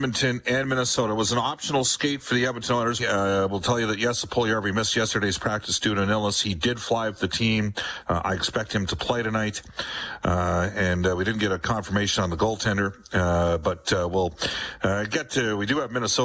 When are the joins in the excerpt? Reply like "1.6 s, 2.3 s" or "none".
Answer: 3.0 s